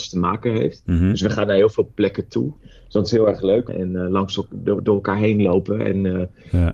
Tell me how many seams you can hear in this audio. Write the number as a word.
two